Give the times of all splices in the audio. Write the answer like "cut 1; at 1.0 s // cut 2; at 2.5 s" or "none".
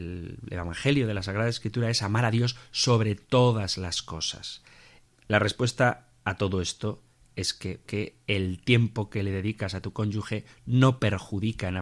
cut 1; at 5.1 s // cut 2; at 7.9 s